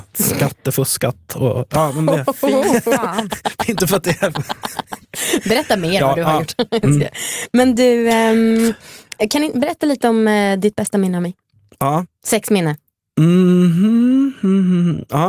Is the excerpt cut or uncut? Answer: uncut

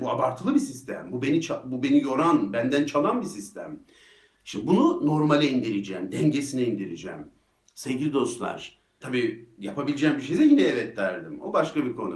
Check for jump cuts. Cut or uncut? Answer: cut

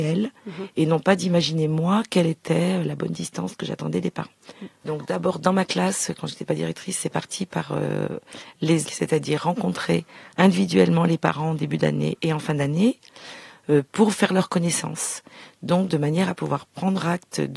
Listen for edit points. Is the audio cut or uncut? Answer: cut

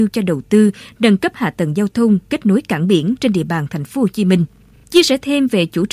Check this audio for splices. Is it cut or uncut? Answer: uncut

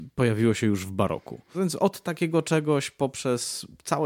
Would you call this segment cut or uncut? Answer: cut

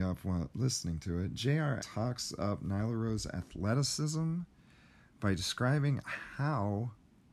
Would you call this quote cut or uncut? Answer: cut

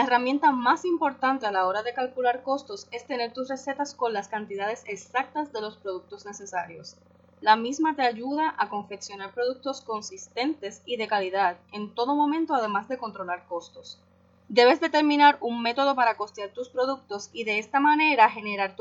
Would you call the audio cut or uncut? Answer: cut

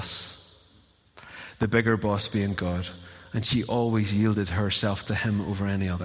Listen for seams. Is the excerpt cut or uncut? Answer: uncut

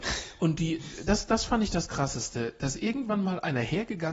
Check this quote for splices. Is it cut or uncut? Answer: uncut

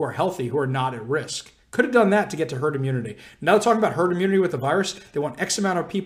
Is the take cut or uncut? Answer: uncut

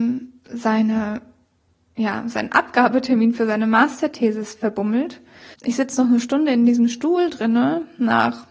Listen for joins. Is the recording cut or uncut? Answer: cut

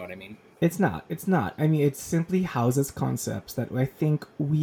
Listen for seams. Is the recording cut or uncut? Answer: uncut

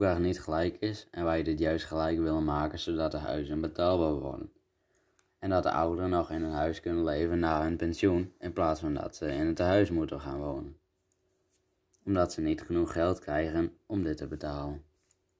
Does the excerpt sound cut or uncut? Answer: uncut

